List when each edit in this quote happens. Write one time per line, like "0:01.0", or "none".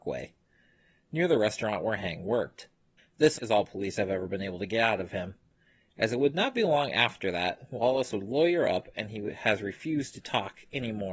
0:03.3